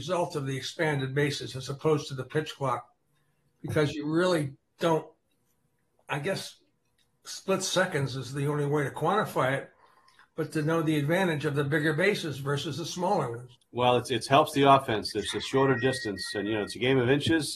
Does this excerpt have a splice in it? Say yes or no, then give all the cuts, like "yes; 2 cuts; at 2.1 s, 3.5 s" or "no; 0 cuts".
no; 0 cuts